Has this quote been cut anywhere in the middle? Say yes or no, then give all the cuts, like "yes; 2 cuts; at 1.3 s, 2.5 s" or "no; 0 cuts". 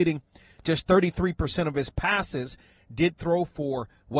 no; 0 cuts